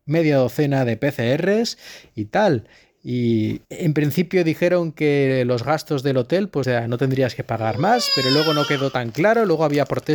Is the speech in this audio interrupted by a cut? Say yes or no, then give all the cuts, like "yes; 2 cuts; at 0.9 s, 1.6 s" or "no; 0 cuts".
yes; 2 cuts; at 3.6 s, 6.6 s